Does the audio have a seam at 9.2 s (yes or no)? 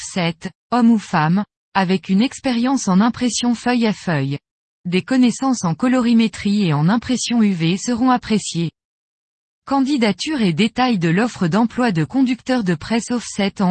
no